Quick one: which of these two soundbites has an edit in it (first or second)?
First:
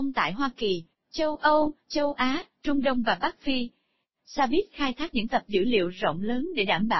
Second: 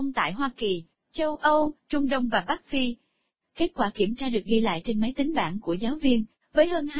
second